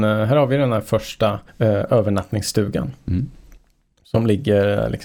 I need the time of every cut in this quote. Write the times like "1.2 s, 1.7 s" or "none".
1.5 s